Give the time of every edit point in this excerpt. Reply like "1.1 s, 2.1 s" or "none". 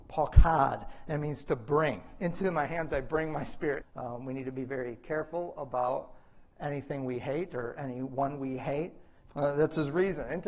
3.8 s, 9.2 s